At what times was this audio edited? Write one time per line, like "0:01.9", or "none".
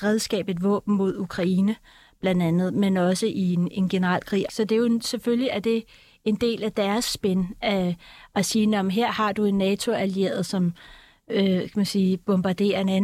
0:04.5

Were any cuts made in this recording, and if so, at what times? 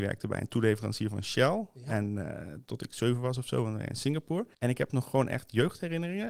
0:04.5

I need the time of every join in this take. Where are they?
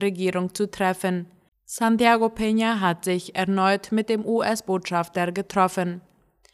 0:01.5

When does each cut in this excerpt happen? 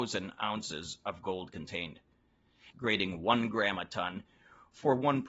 0:02.7

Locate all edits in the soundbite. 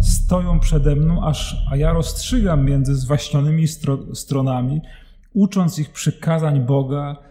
none

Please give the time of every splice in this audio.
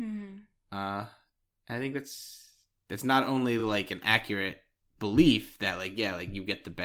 none

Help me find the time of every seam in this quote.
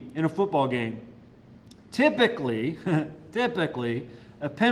none

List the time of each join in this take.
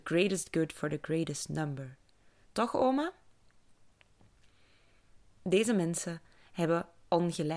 0:02.4

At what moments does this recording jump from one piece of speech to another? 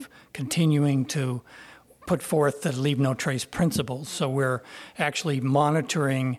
none

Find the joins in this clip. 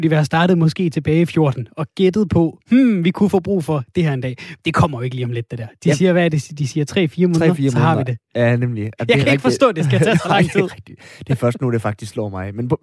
none

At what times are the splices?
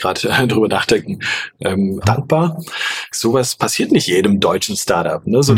0:02.0
0:03.1

